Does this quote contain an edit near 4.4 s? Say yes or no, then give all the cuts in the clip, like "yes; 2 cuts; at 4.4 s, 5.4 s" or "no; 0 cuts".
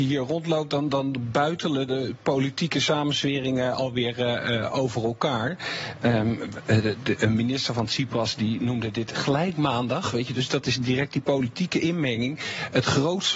no; 0 cuts